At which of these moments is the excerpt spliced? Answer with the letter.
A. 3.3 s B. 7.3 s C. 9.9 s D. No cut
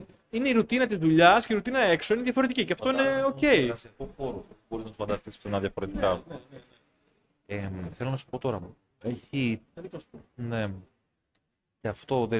C